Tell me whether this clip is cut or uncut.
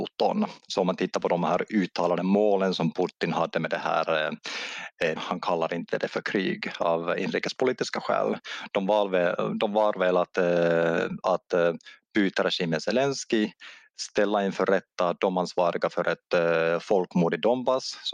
cut